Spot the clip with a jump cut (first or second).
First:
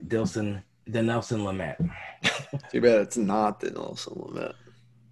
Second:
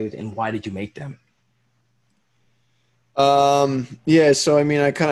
first